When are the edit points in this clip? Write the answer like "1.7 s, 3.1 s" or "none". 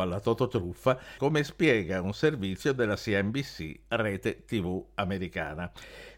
1.2 s